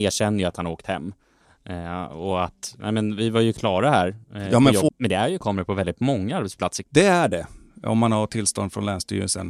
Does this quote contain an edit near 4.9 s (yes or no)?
yes